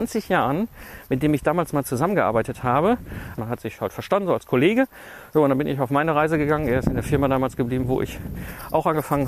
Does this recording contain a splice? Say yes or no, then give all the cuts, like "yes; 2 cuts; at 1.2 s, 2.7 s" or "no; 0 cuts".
yes; 1 cut; at 3.4 s